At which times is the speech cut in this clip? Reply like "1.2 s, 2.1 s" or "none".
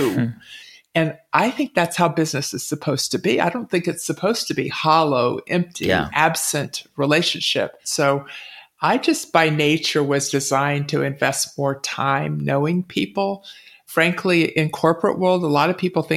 none